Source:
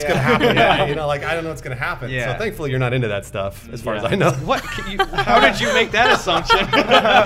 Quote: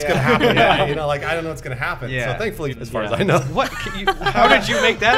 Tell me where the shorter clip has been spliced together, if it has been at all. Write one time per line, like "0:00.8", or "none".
0:02.7